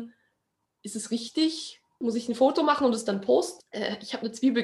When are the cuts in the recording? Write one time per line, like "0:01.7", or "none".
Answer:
0:02.0
0:03.6